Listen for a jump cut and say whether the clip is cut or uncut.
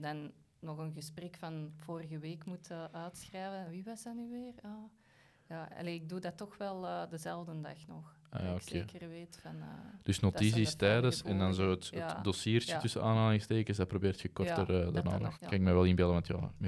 cut